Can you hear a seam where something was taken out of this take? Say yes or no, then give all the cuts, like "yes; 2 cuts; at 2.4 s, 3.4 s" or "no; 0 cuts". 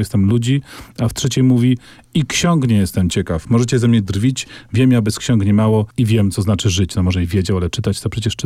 yes; 1 cut; at 5.9 s